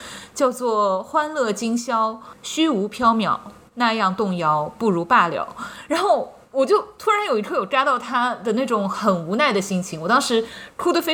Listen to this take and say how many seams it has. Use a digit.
0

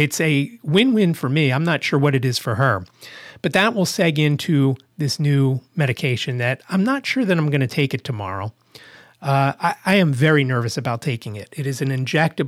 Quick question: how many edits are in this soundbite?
0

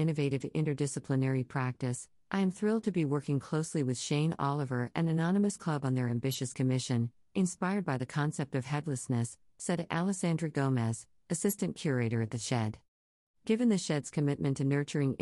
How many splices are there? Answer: 2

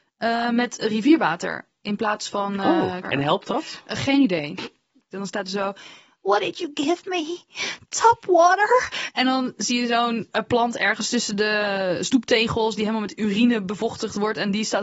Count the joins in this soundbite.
2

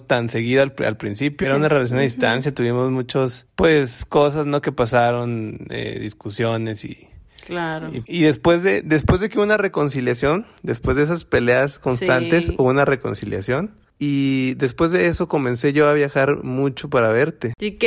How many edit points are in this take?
2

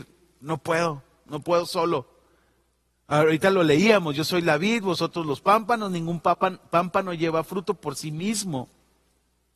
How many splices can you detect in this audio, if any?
0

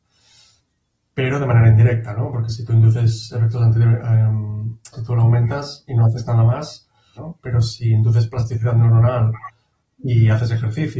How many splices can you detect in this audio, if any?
2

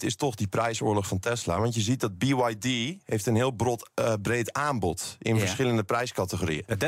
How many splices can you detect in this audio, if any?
0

